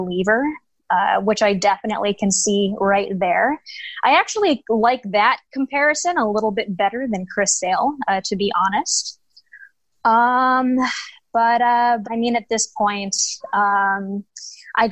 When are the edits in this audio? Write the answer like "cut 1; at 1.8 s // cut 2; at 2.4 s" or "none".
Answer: cut 1; at 12.0 s